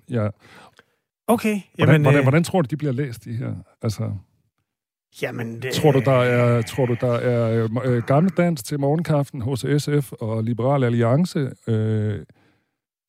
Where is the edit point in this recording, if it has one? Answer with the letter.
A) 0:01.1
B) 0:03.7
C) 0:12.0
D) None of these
A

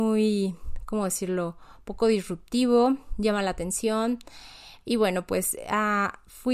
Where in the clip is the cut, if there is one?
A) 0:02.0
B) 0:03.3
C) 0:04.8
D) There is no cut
C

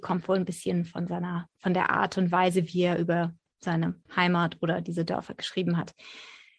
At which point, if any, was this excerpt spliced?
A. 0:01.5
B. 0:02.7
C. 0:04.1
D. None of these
C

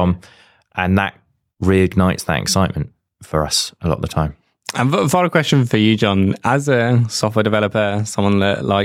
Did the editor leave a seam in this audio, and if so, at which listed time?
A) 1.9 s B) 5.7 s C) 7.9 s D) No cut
B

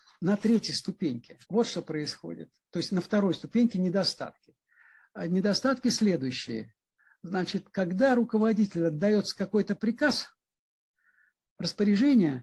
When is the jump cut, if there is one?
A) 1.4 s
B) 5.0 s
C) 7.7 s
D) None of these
A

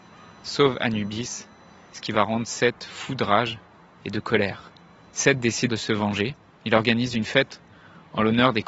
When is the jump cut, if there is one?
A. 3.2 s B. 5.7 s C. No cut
B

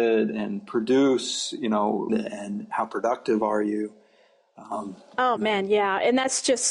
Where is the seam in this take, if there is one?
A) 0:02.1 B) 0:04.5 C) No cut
A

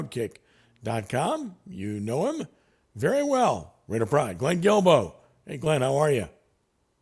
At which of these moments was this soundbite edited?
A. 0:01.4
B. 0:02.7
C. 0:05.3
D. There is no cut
D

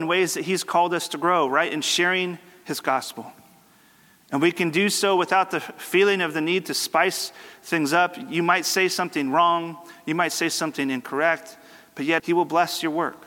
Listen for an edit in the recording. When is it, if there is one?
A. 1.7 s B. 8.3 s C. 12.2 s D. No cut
C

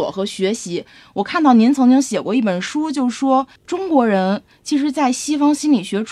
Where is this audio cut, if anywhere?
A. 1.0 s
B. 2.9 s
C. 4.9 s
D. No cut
D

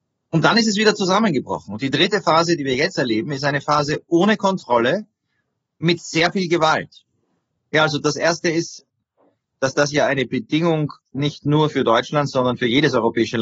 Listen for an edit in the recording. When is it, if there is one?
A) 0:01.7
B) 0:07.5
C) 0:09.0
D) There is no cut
B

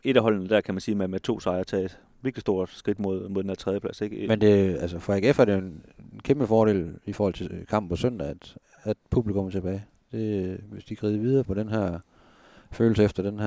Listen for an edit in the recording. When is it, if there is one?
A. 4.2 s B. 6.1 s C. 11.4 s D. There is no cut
C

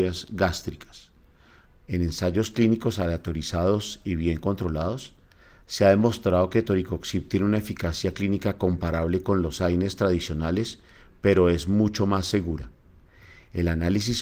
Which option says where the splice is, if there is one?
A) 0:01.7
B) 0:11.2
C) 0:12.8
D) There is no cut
A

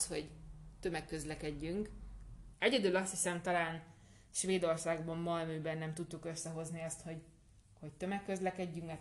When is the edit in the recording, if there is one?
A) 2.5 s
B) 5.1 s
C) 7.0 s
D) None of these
A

